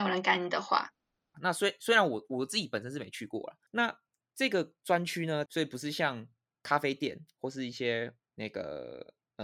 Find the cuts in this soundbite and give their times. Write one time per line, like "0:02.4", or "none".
0:01.3
0:03.7
0:05.5